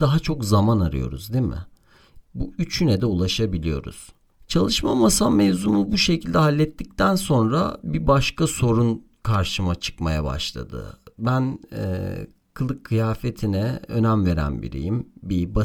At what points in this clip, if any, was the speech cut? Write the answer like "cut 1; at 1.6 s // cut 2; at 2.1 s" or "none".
cut 1; at 2.2 s